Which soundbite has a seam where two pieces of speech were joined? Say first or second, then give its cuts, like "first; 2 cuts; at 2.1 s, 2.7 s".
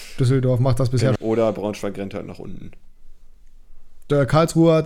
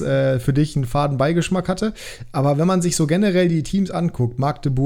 first; 1 cut; at 1.2 s